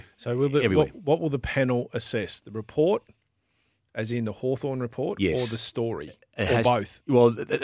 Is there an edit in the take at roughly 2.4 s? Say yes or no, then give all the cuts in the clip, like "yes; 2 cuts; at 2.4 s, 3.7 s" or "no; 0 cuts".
no; 0 cuts